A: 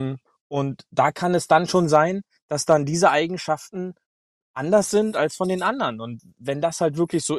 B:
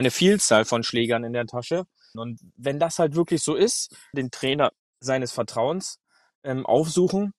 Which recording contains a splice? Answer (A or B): B